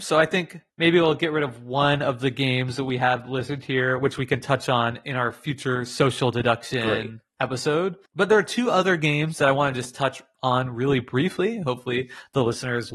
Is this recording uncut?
yes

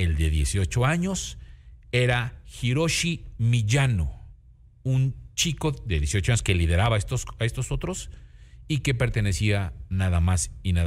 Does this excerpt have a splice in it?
no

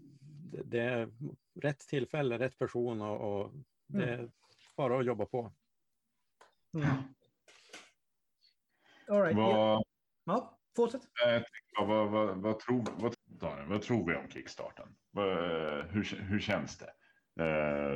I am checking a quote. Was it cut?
yes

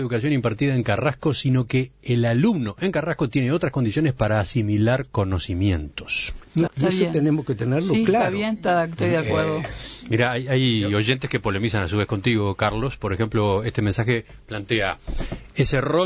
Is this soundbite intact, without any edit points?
no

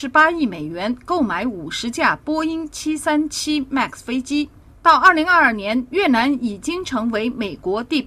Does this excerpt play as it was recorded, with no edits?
no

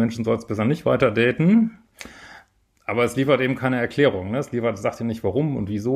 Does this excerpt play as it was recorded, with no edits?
yes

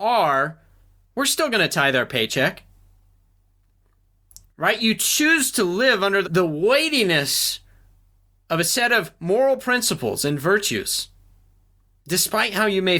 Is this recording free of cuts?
no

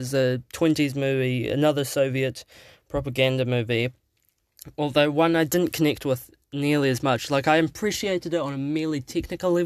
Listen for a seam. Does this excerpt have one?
no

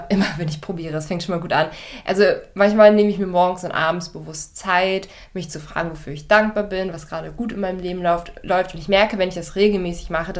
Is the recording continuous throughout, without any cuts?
yes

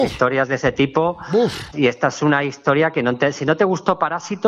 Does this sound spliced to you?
yes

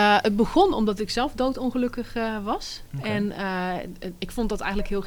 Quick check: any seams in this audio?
no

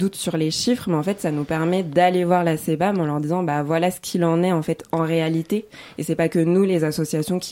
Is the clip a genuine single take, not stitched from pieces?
yes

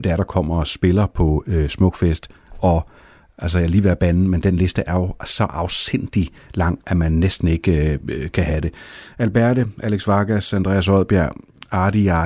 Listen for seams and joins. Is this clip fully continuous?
yes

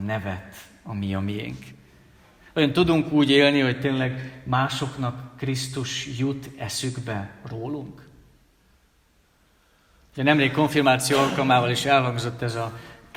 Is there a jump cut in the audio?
no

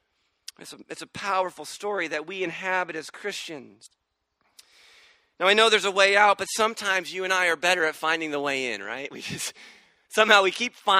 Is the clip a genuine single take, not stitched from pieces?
yes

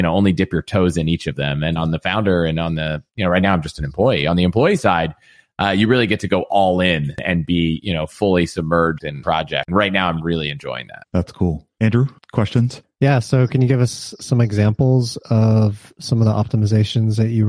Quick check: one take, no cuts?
yes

